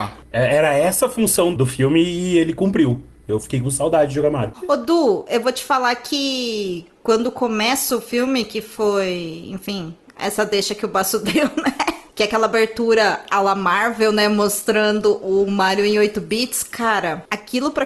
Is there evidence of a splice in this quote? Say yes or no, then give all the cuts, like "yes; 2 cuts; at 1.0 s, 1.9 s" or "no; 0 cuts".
no; 0 cuts